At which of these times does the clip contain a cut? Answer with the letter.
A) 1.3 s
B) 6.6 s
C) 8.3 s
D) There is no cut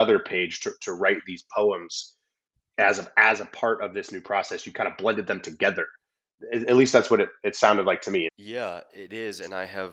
C